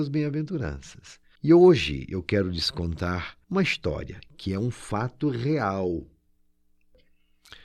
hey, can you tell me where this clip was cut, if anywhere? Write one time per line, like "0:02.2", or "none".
0:01.4
0:03.4